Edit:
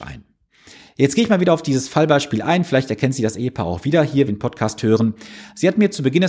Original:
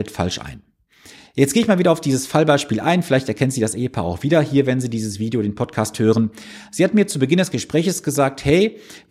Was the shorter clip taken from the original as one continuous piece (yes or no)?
no